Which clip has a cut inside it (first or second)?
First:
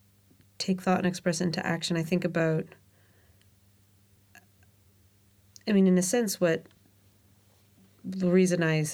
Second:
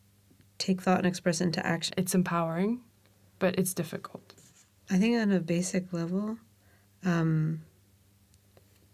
second